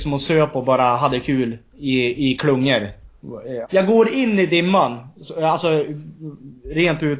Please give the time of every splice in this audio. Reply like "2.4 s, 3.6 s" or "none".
3.6 s